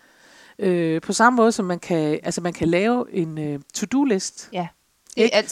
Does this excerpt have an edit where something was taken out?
no; 0 cuts

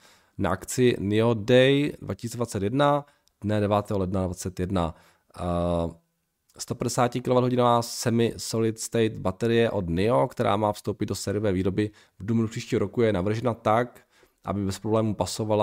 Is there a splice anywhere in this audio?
no; 0 cuts

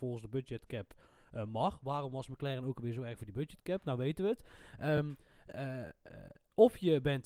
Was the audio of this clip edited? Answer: no; 0 cuts

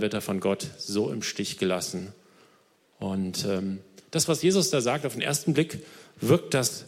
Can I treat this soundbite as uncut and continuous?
yes; 0 cuts

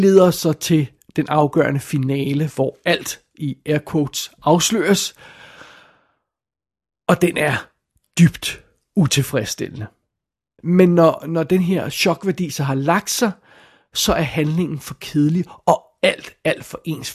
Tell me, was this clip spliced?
yes; 1 cut; at 10.6 s

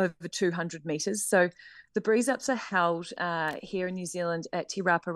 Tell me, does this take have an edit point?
no; 0 cuts

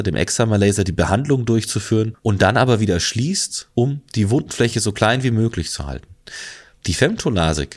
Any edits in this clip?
no; 0 cuts

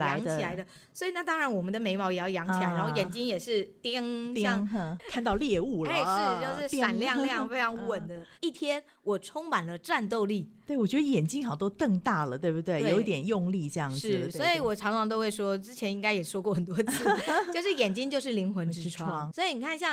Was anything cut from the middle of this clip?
yes; 1 cut; at 8.4 s

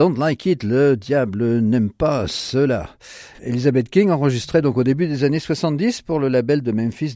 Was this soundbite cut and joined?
yes; 1 cut; at 3.3 s

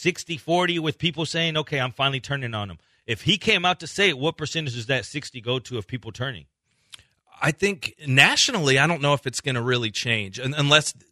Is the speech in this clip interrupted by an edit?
no; 0 cuts

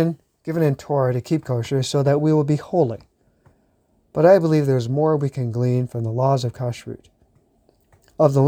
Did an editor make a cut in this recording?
no; 0 cuts

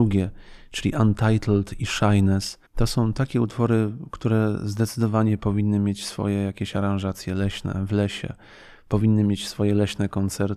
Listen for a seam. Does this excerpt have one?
yes; 1 cut; at 2.7 s

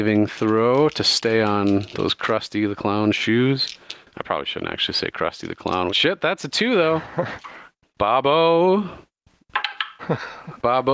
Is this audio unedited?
no; 2 cuts; at 5.9 s, 7.8 s

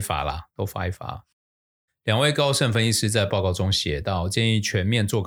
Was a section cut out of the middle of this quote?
yes; 1 cut; at 1.9 s

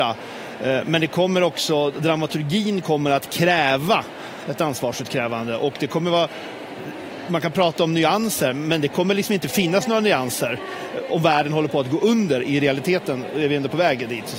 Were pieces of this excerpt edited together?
no; 0 cuts

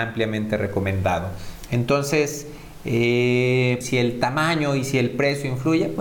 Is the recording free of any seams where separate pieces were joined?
no; 2 cuts; at 1.7 s, 3.8 s

